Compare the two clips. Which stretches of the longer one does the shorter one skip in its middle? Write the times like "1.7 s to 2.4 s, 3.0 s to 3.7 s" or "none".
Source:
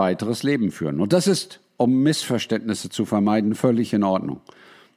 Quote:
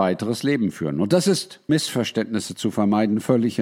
1.7 s to 2.0 s